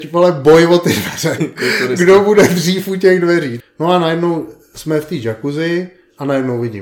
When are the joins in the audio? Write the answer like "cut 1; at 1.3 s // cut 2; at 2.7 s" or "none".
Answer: cut 1; at 1.4 s // cut 2; at 3.6 s